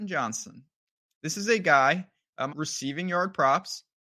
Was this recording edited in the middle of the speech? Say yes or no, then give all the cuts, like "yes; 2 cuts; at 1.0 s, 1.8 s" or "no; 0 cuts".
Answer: yes; 1 cut; at 2.5 s